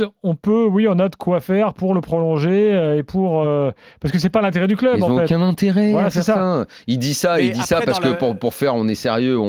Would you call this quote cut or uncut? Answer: uncut